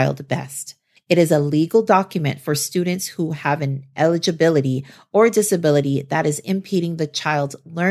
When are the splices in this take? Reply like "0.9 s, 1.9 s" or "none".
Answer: 1.0 s